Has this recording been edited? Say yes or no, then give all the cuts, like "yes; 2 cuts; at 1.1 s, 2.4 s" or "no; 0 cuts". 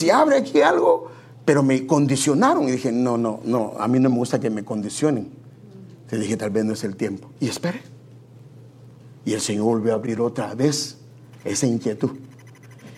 no; 0 cuts